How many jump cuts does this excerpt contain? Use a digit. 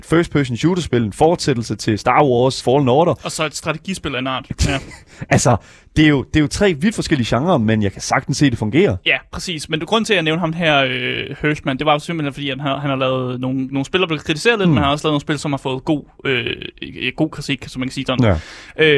1